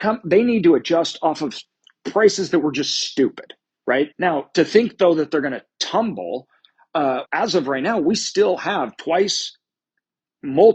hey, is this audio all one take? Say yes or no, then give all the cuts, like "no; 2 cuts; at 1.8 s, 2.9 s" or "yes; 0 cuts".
no; 2 cuts; at 4.1 s, 7.2 s